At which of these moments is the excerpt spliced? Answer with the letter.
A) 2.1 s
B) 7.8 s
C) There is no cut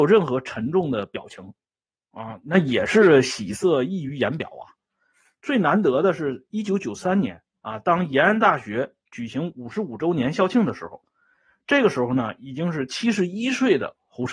C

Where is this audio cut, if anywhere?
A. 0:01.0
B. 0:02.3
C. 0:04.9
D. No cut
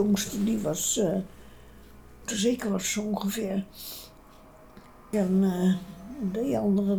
B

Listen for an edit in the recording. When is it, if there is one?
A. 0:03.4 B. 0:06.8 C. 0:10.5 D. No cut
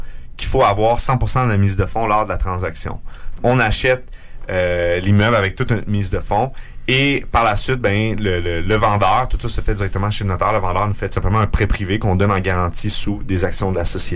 A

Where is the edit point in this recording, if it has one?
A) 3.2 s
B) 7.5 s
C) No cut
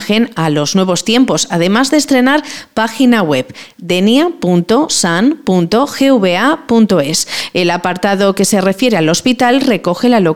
B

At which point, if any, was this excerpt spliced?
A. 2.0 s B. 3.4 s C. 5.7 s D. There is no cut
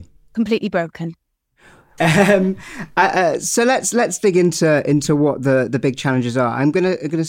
A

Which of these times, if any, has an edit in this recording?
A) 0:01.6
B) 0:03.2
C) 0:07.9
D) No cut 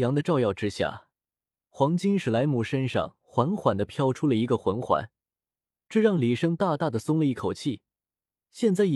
D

